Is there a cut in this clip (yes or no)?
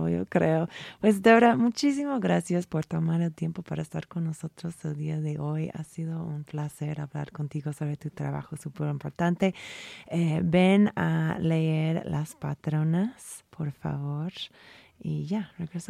no